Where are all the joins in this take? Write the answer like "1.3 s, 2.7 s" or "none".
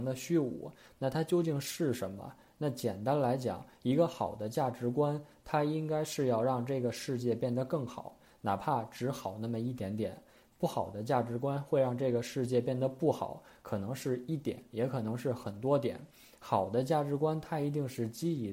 none